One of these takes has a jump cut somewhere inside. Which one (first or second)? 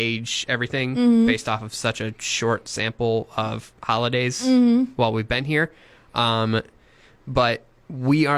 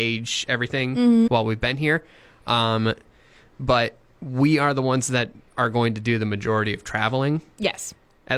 second